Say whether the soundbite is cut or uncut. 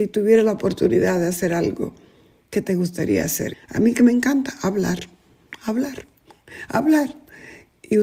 cut